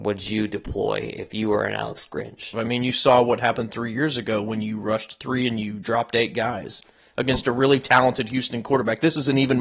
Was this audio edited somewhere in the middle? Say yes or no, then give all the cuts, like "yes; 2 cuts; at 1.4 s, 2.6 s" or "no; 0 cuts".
yes; 1 cut; at 2.5 s